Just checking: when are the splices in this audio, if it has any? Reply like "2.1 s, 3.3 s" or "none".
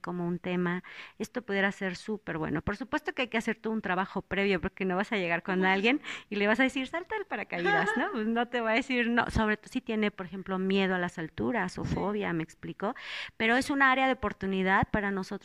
none